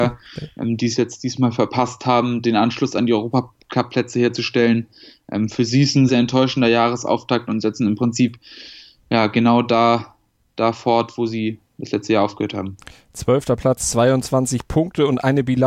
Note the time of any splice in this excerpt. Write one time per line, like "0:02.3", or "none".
0:06.1